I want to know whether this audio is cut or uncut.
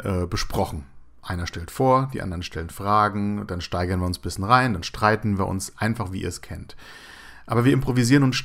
uncut